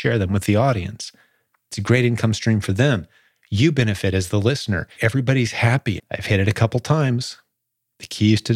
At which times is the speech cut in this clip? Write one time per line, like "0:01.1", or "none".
0:05.0
0:06.0